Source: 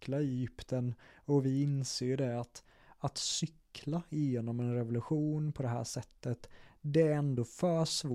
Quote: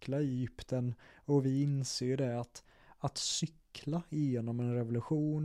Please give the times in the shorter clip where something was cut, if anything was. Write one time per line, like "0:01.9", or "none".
none